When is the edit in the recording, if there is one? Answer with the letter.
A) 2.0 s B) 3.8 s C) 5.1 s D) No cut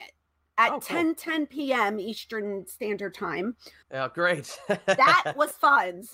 B